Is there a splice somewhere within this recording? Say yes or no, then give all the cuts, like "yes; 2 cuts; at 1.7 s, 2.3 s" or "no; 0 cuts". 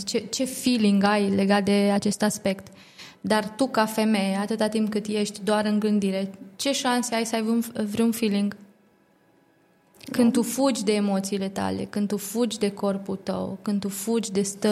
no; 0 cuts